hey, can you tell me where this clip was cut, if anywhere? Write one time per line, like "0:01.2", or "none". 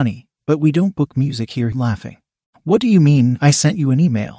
0:01.7